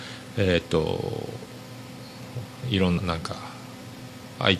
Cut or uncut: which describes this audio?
cut